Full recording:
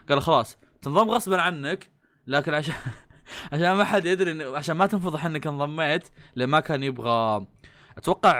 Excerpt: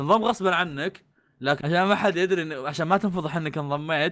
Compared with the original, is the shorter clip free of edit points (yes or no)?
no